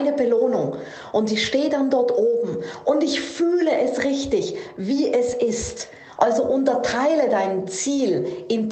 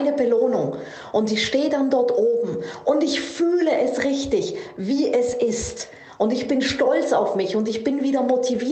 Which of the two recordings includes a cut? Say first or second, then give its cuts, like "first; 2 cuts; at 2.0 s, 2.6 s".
first; 1 cut; at 6.2 s